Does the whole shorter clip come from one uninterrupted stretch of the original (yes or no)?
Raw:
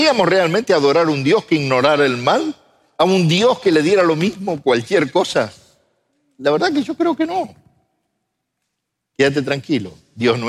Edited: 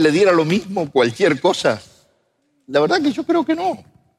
yes